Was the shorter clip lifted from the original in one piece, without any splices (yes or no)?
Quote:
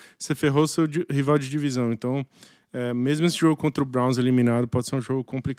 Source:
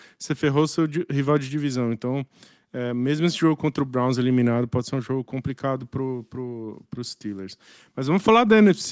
yes